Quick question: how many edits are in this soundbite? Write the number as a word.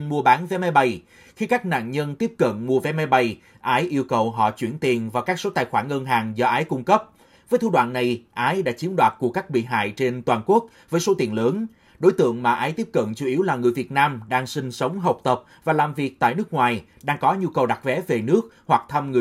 one